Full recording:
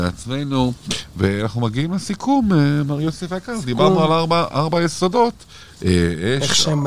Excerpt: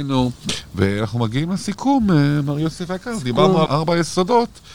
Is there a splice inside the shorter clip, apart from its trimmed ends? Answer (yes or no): yes